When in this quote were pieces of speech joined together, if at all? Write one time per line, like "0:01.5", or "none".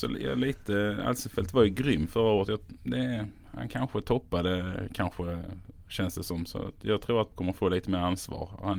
0:07.3